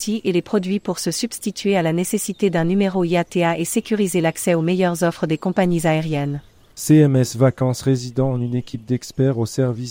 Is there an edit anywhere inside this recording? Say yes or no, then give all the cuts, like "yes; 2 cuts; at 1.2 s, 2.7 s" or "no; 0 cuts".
yes; 1 cut; at 6.7 s